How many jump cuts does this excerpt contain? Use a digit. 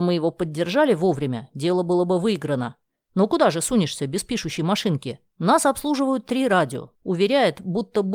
2